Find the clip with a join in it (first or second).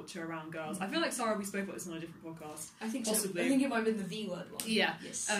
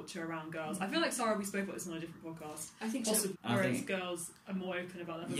second